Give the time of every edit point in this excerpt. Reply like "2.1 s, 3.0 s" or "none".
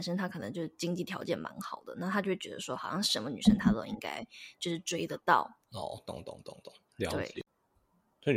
5.6 s